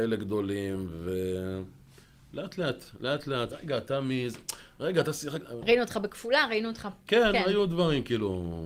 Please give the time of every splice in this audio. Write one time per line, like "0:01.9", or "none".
0:03.5
0:05.6